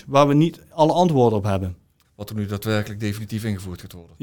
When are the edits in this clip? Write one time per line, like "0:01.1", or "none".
0:02.0